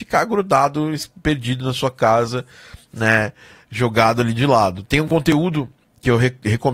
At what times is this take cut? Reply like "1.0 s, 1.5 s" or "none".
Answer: 4.8 s

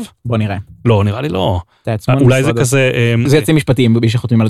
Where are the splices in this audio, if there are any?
3.3 s

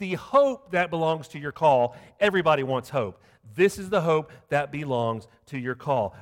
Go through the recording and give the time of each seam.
none

